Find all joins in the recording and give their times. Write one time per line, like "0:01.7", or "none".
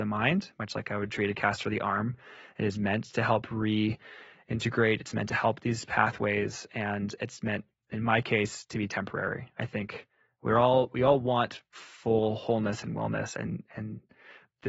none